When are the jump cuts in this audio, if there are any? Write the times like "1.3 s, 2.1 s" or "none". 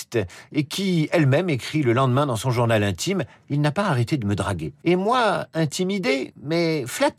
4.8 s

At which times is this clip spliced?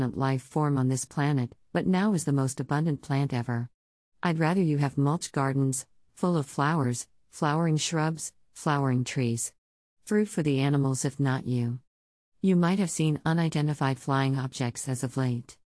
6.1 s, 12.2 s

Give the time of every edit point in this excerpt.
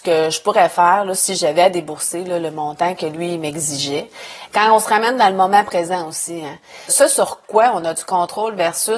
4.5 s, 6.9 s

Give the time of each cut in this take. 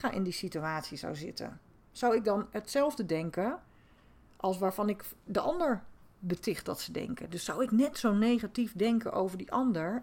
none

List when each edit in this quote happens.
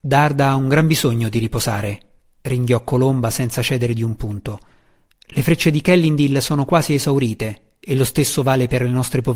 none

